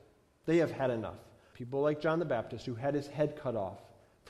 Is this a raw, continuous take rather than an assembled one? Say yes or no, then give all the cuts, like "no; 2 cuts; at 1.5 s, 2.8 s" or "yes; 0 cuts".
no; 1 cut; at 1.5 s